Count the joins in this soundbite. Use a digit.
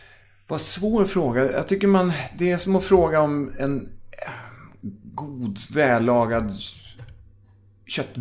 0